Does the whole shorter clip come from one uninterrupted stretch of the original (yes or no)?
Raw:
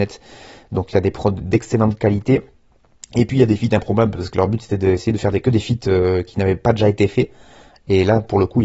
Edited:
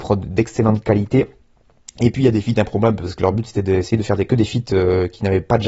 yes